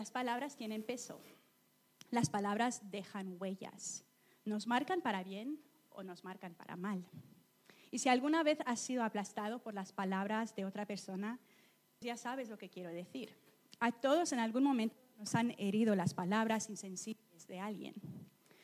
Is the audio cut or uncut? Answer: cut